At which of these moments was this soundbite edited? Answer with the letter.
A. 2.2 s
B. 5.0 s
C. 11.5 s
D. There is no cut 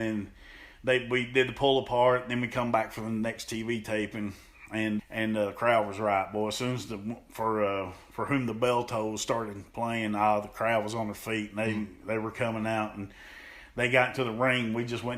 B